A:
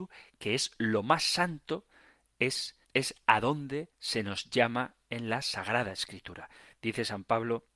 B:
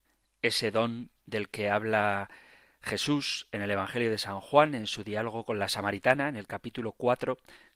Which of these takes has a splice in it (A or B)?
A